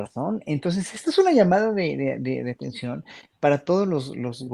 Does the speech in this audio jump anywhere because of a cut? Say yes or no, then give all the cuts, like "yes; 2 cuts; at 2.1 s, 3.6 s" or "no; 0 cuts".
no; 0 cuts